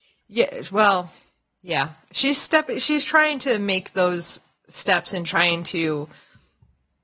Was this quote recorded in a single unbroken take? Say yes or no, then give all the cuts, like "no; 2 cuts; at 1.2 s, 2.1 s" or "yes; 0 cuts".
yes; 0 cuts